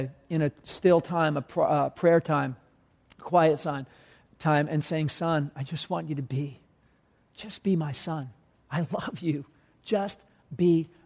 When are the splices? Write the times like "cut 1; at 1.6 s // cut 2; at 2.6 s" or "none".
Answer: none